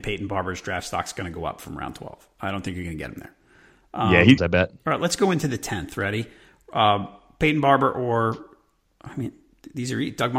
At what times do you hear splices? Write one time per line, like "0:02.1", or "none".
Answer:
0:04.4